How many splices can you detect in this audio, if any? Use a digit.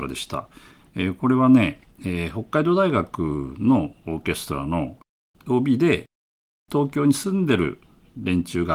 0